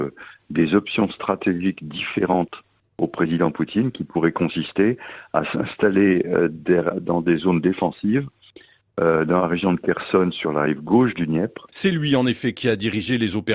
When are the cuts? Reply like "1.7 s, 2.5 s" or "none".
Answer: 11.7 s